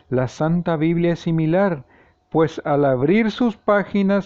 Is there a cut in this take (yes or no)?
no